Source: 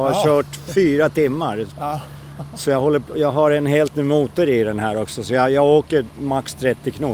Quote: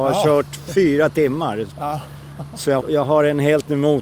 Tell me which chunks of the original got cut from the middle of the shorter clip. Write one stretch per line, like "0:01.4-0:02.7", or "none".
0:02.8-0:03.1